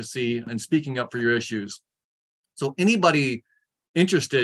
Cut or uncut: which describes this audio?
uncut